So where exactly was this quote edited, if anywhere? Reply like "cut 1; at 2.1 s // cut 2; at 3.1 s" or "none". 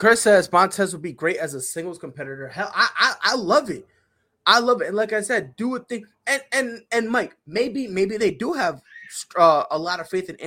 none